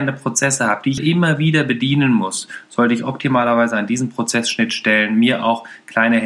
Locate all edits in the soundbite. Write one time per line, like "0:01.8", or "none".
0:01.0